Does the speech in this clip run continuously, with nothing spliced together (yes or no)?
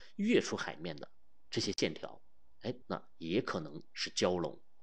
no